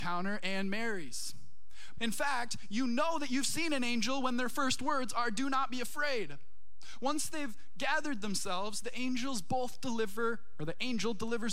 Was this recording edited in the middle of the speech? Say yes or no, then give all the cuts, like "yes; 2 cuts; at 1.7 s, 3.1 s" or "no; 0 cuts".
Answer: yes; 1 cut; at 2.0 s